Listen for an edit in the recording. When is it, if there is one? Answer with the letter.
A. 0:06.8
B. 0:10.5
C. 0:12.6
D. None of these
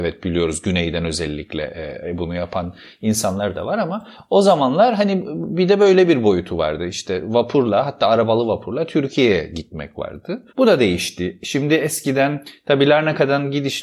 B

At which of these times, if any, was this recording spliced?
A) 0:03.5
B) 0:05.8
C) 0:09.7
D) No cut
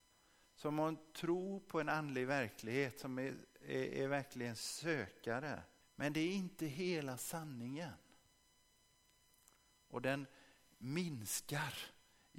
B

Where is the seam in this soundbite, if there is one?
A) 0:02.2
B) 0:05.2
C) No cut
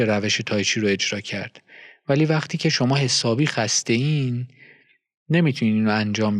C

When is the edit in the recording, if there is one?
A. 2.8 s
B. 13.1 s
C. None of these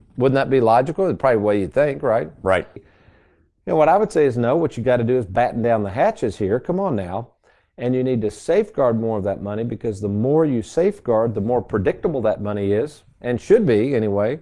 A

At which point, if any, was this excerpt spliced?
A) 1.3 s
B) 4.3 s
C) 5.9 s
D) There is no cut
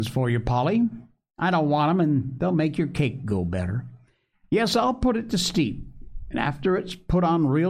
B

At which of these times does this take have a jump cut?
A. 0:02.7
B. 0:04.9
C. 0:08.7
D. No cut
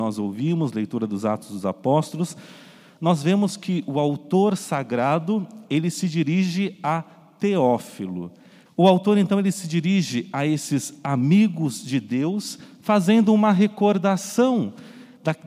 C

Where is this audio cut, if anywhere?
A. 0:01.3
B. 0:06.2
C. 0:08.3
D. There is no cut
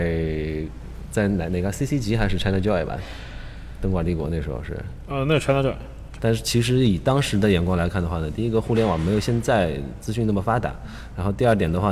B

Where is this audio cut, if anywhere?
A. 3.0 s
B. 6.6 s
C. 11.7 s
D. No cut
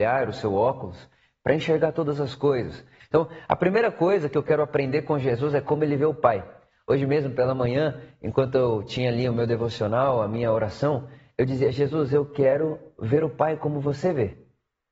A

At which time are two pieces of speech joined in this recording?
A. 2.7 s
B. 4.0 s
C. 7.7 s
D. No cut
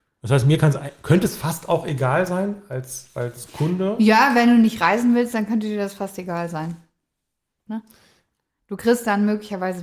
C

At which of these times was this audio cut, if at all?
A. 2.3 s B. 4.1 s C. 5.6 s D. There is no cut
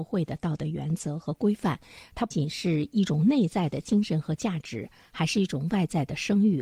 A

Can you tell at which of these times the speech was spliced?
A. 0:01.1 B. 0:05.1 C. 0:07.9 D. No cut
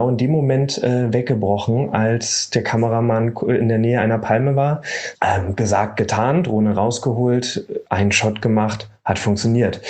B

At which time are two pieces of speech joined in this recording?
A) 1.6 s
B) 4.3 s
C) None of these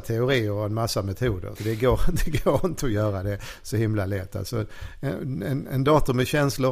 A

